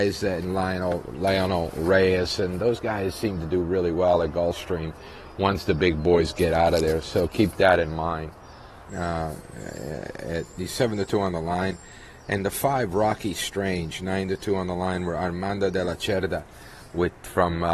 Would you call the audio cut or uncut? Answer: cut